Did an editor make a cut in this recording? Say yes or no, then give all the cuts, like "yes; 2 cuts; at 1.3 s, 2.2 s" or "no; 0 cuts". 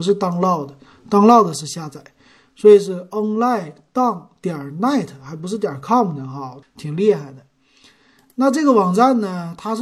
yes; 1 cut; at 6.6 s